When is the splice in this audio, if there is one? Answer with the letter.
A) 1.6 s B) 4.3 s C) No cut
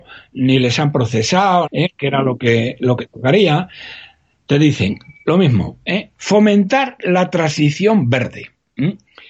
A